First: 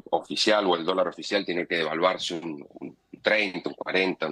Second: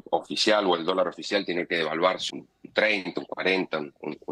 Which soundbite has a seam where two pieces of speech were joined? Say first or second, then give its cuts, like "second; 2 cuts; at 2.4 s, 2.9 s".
second; 1 cut; at 2.3 s